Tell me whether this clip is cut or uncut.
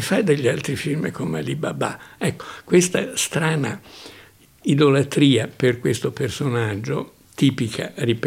uncut